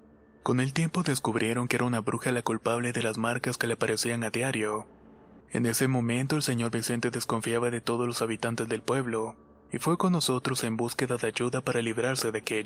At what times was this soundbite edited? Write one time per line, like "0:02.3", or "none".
0:05.4